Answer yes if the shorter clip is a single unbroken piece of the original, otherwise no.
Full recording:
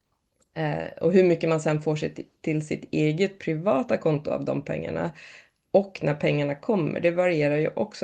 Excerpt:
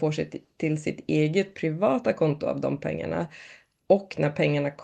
yes